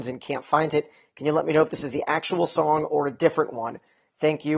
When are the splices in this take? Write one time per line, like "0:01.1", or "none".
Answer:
none